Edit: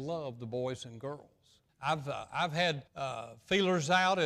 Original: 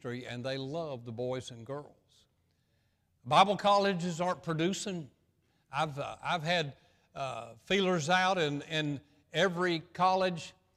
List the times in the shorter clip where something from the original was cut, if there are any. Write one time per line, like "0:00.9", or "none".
0:01.7
0:02.9